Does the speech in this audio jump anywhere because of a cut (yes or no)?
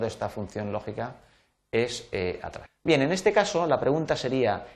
yes